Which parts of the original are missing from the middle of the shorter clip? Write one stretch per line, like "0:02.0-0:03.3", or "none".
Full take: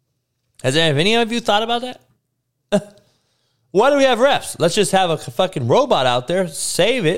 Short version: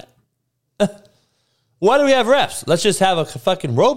none